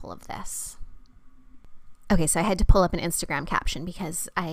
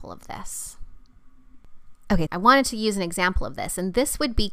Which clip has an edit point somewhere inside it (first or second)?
second